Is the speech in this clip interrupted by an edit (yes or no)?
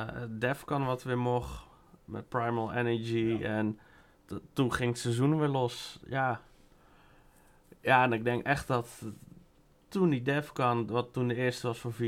no